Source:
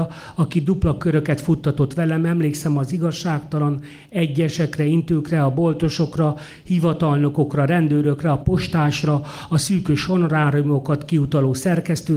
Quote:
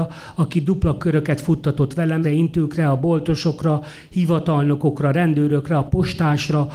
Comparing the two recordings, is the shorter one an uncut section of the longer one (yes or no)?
no